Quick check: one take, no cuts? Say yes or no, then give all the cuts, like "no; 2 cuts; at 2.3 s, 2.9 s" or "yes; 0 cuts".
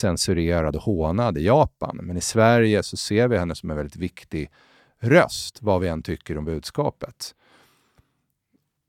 yes; 0 cuts